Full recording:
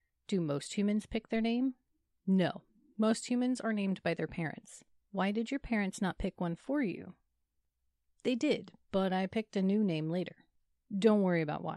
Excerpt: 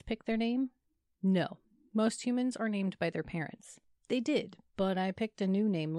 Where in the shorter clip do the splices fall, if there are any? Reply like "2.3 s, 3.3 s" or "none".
4.0 s